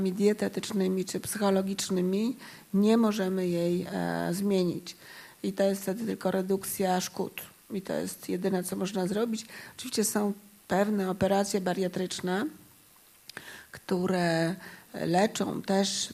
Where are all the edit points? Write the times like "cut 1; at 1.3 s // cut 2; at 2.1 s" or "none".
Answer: none